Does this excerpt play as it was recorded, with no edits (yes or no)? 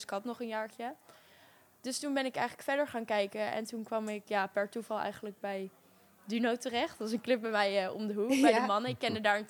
yes